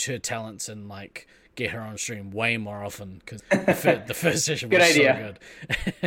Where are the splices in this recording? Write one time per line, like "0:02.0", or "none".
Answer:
0:03.4